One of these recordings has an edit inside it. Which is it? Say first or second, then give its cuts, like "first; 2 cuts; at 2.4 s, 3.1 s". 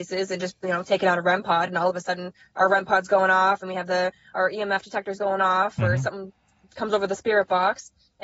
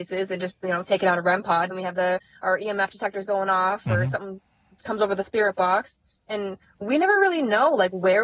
second; 1 cut; at 1.7 s